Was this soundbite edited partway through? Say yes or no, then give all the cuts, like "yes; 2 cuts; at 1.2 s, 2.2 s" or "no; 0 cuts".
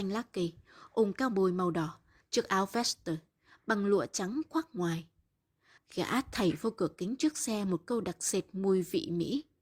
yes; 2 cuts; at 2.2 s, 5.8 s